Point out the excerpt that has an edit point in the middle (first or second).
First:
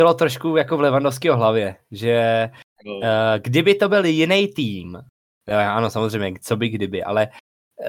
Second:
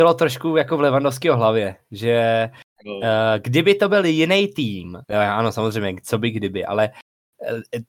second